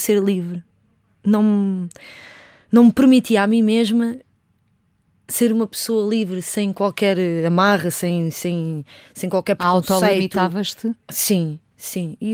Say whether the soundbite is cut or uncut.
uncut